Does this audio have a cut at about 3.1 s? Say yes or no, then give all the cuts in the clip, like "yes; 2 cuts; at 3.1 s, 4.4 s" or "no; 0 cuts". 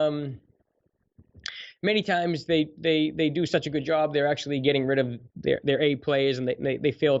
no; 0 cuts